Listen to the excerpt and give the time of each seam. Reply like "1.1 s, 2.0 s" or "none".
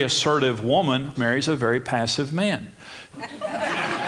1.1 s, 3.1 s